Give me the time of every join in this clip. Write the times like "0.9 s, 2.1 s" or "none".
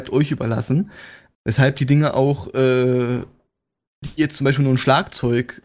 1.3 s, 4.0 s

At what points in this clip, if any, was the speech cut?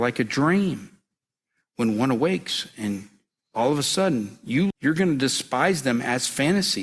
4.7 s

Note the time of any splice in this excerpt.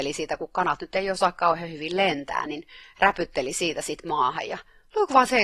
none

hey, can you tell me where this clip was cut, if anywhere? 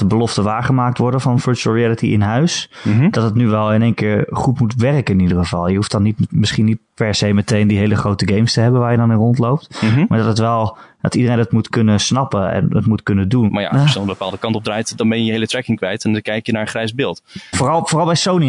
13.5 s, 17.5 s

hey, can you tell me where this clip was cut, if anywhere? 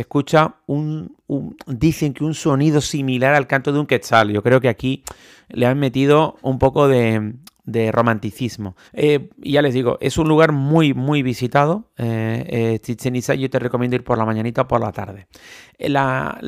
8.9 s

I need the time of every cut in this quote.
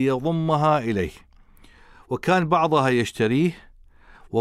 none

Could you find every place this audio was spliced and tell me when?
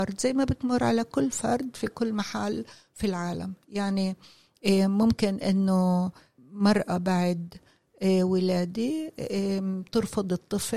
none

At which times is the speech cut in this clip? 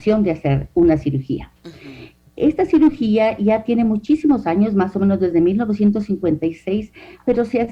none

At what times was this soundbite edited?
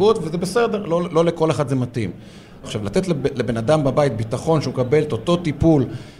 2.6 s

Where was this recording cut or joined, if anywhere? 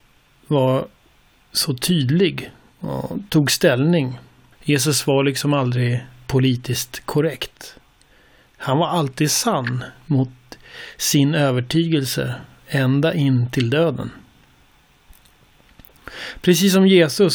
4.5 s

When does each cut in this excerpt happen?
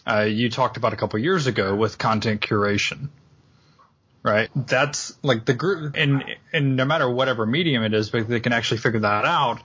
4.5 s, 5.9 s

